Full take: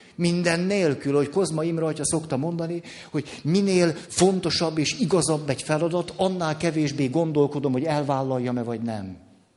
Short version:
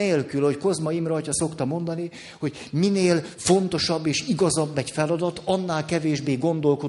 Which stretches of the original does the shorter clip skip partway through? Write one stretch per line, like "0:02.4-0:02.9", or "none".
none